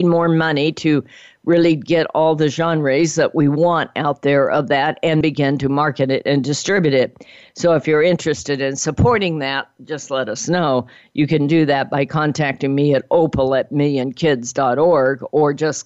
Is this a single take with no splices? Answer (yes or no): no